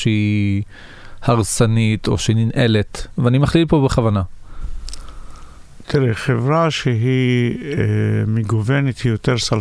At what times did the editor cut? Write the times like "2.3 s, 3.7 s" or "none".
none